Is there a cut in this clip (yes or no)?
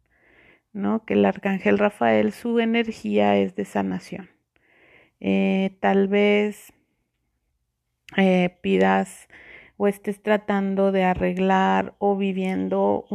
no